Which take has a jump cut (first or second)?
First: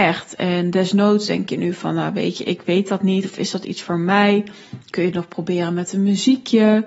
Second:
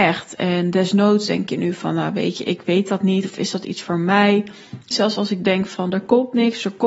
second